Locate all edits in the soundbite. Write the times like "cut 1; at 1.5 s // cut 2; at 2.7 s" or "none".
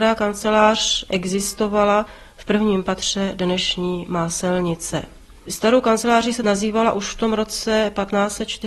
none